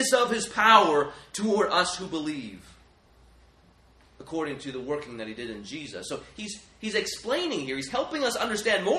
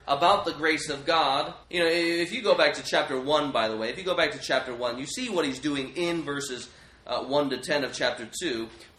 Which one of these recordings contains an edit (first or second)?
second